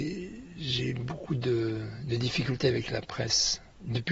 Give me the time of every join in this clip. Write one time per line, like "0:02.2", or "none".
none